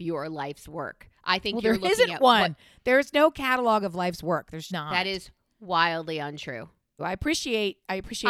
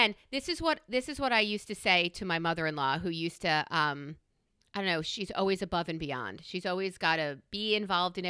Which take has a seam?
first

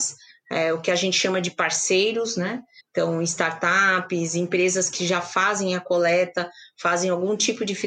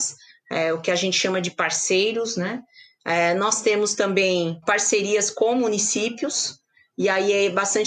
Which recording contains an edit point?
first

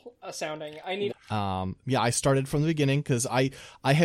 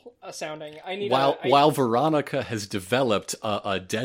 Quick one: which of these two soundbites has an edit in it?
first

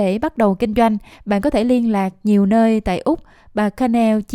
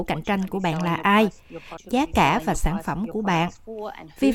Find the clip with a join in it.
second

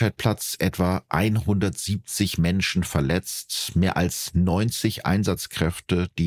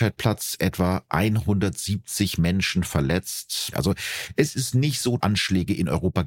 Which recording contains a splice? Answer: second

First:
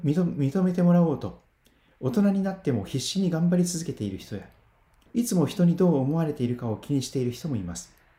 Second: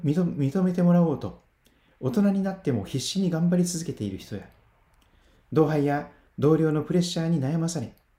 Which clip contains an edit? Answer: first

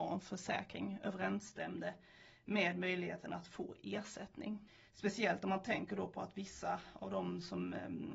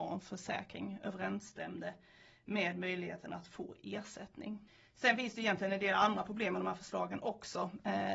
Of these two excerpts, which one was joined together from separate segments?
first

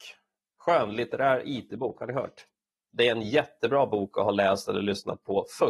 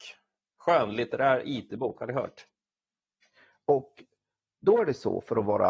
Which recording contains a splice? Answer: first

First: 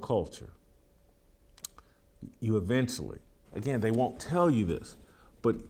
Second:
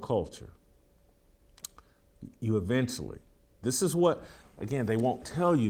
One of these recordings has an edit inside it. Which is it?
first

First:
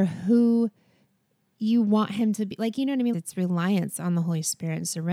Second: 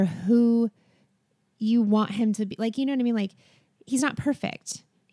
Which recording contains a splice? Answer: first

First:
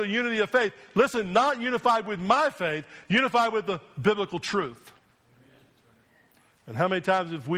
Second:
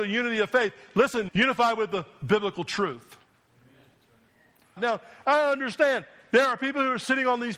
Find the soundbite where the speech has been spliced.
second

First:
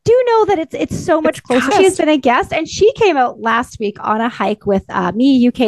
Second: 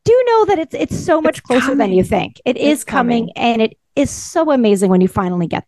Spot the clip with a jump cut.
first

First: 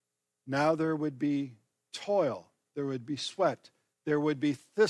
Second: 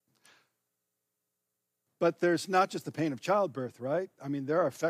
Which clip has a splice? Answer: first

